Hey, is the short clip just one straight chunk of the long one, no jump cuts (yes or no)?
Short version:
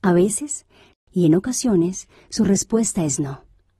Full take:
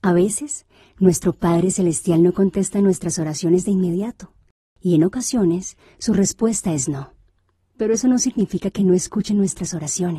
no